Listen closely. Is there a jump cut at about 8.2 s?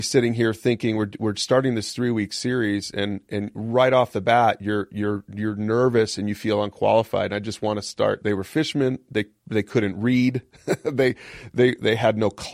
yes; 1 cut; at 8.2 s

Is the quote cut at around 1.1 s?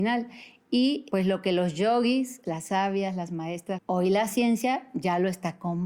yes; 3 cuts; at 1.1 s, 2.4 s, 3.8 s

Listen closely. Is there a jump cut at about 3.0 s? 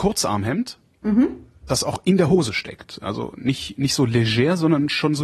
no; 0 cuts

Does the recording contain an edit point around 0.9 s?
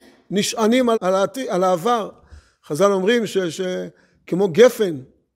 yes; 1 cut; at 0.9 s

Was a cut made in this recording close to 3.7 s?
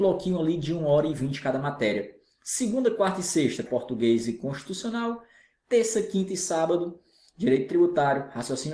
yes; 1 cut; at 3.7 s

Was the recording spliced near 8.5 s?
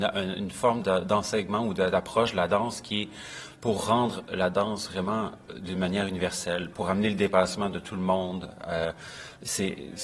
no; 0 cuts

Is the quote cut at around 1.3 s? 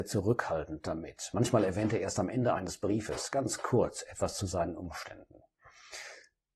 no; 0 cuts

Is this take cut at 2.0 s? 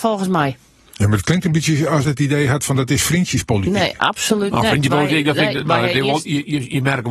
yes; 2 cuts; at 2.0 s, 5.6 s

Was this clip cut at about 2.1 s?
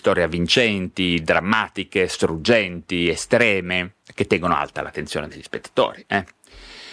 no; 1 cut; at 4.0 s

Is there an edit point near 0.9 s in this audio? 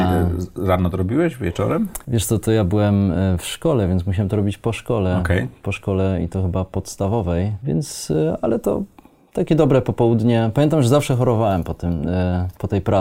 no; 0 cuts

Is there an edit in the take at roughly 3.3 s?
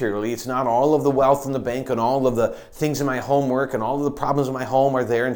no; 0 cuts

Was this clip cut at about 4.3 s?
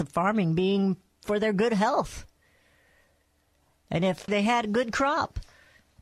yes; 1 cut; at 4.3 s

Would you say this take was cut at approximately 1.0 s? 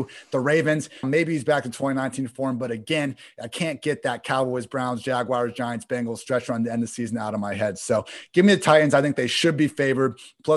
yes; 1 cut; at 1.0 s

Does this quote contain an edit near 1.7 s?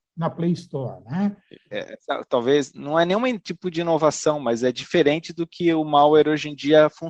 yes; 1 cut; at 1.7 s

